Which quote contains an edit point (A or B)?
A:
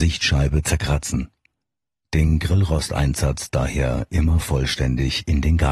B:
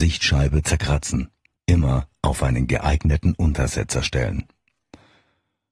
B